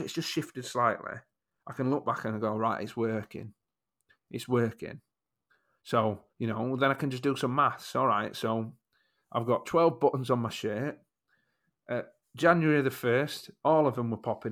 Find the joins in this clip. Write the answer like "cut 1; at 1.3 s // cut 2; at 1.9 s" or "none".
cut 1; at 6.3 s